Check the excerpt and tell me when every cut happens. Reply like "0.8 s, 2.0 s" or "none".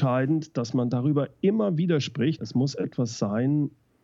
2.4 s